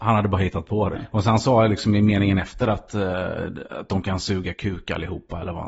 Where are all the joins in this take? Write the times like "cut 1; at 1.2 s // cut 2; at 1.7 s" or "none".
cut 1; at 0.9 s

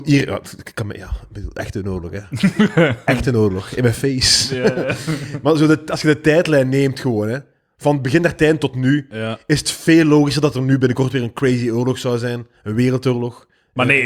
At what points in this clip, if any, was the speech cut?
none

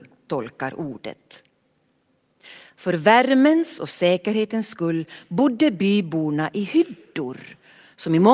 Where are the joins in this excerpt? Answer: none

